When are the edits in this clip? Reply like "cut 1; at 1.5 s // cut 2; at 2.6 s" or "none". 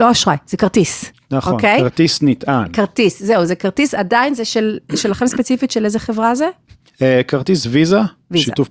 none